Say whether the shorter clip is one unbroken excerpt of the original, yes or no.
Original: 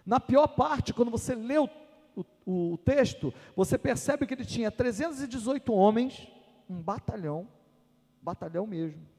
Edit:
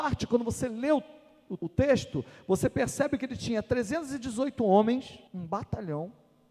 no